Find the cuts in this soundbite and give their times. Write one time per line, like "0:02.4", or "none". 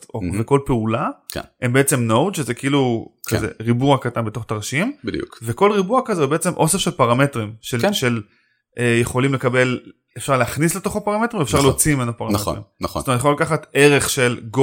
none